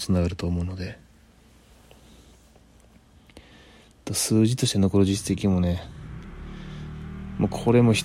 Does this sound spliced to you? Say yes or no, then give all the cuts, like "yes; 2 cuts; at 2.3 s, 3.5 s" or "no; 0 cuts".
no; 0 cuts